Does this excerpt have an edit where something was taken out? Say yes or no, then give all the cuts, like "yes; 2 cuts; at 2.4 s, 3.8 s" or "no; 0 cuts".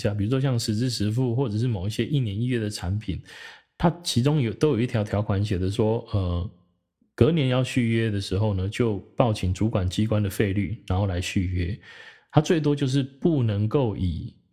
no; 0 cuts